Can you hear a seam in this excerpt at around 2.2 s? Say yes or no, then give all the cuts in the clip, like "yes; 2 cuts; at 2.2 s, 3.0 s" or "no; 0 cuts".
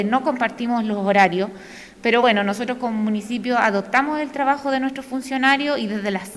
no; 0 cuts